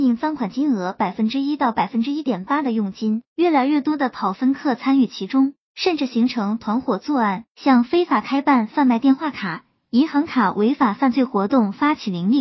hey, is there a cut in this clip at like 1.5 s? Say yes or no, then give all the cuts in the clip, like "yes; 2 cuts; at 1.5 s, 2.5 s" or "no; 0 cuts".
no; 2 cuts; at 3.3 s, 7.5 s